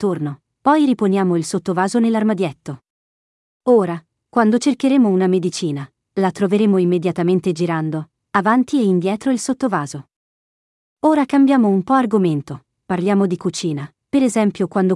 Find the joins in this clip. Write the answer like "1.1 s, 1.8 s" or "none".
none